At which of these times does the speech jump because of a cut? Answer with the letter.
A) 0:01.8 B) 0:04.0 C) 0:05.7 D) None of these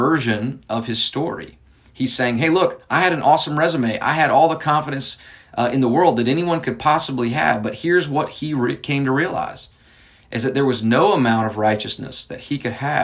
D